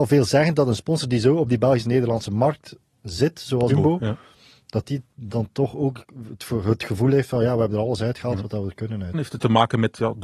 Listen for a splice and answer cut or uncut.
cut